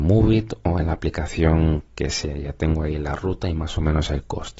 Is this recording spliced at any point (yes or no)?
no